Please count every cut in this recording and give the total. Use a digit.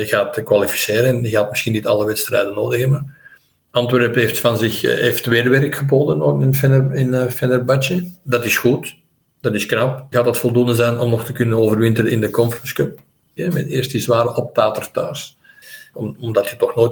3